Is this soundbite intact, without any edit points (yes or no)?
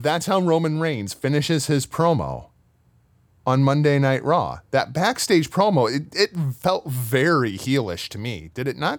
yes